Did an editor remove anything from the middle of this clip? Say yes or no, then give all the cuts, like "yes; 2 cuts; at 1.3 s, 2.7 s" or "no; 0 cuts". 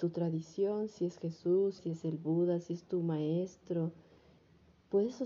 yes; 1 cut; at 1.8 s